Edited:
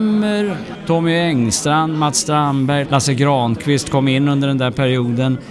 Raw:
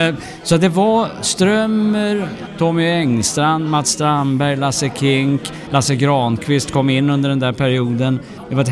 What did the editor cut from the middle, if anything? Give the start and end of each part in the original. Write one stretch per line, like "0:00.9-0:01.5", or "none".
0:04.6-0:05.7